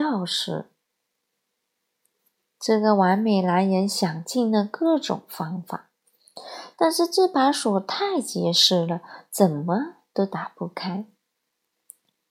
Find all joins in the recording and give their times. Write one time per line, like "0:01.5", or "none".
0:06.7